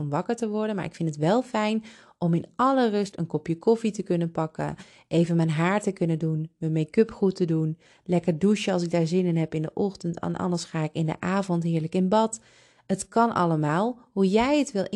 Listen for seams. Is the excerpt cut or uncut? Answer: uncut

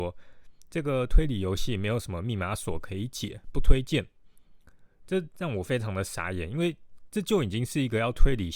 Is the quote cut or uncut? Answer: uncut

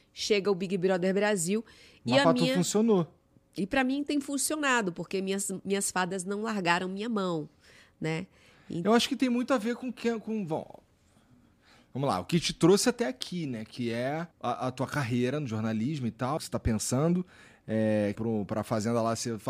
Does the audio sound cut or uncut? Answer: cut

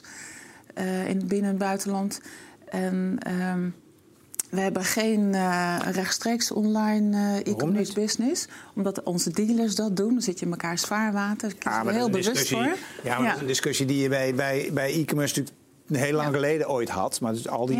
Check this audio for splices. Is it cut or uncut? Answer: uncut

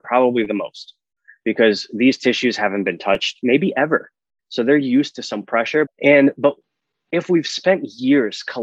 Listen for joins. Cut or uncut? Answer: cut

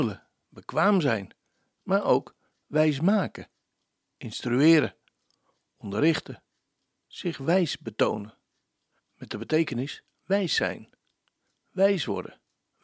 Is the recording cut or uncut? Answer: cut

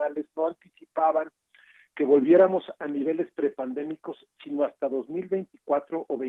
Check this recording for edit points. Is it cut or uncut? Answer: uncut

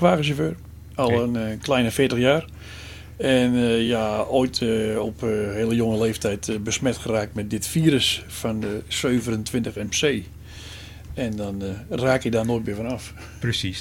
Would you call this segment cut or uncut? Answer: uncut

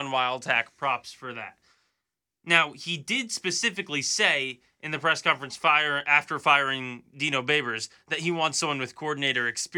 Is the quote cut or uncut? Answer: uncut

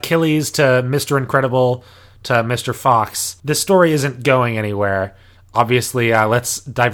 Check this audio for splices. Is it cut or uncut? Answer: uncut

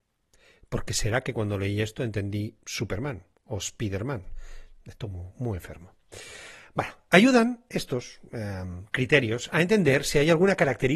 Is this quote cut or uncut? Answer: uncut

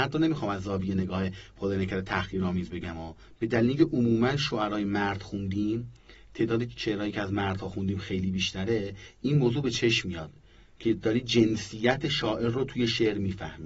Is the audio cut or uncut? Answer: uncut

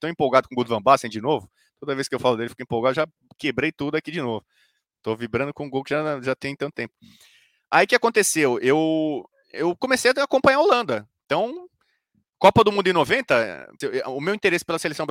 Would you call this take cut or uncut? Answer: cut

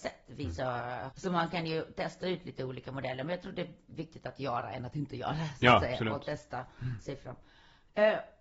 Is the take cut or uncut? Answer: cut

